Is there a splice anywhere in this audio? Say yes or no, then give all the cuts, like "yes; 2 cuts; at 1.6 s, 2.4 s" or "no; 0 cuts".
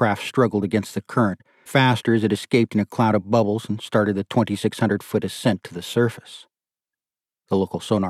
yes; 1 cut; at 1.7 s